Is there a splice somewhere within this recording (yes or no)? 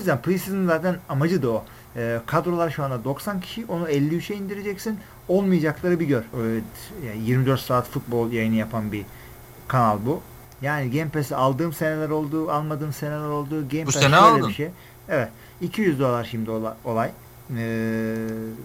yes